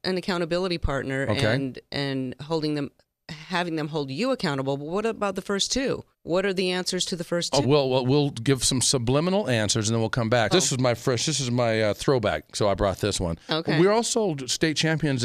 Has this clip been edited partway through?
yes; 3 cuts; at 6.1 s, 7.6 s, 10.5 s

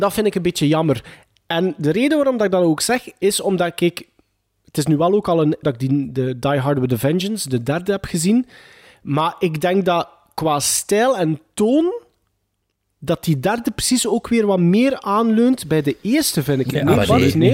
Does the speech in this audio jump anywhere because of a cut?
yes; 1 cut; at 5.6 s

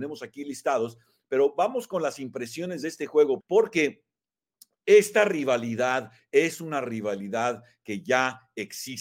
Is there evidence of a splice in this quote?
yes; 1 cut; at 3.4 s

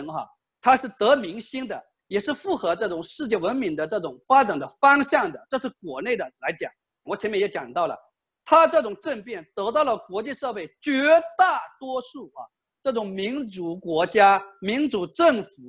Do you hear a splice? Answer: yes; 1 cut; at 7.1 s

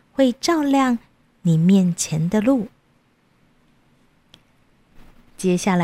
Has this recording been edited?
no; 0 cuts

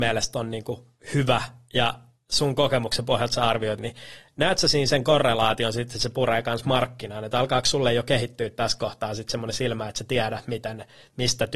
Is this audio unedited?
no; 1 cut; at 3.8 s

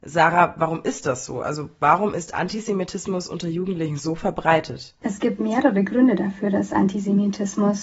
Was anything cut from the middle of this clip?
yes; 1 cut; at 5.0 s

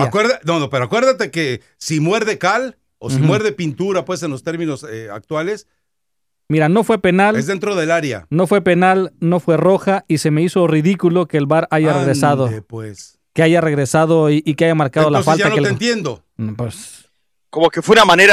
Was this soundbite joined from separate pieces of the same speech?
no; 0 cuts

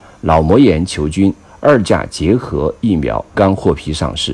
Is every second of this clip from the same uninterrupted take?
no; 1 cut; at 3.3 s

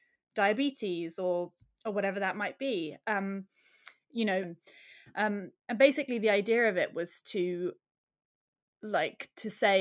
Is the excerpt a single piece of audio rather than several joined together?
no; 1 cut; at 4.4 s

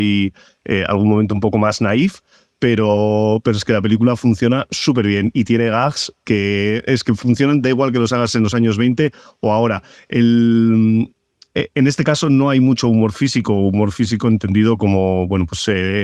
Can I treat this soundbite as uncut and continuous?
yes; 0 cuts

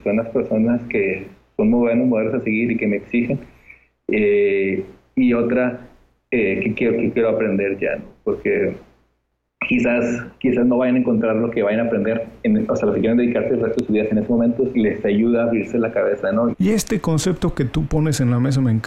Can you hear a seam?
yes; 2 cuts; at 14.7 s, 16.5 s

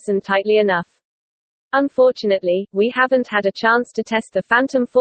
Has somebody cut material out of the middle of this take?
yes; 1 cut; at 1.6 s

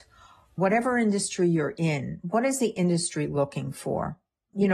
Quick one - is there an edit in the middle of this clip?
no; 0 cuts

